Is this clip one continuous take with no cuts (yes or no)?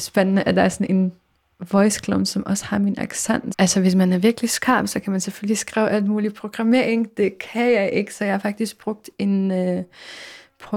no